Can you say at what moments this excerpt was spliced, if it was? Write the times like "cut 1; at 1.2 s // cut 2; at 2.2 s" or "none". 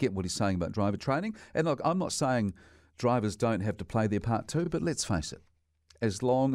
none